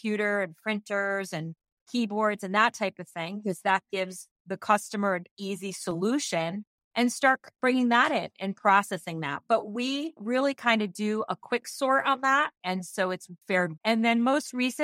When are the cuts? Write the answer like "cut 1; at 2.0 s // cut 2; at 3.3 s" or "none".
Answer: cut 1; at 12.6 s // cut 2; at 13.8 s